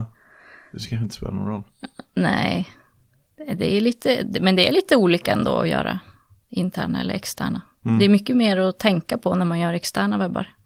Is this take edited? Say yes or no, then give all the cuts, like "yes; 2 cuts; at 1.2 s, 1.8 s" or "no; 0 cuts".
no; 0 cuts